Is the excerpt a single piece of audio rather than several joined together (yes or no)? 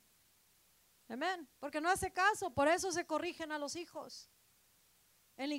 no